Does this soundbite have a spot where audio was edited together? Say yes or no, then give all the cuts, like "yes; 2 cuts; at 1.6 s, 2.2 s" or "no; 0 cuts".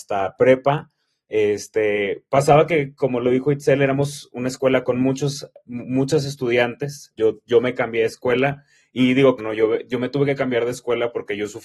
yes; 2 cuts; at 7.1 s, 9.4 s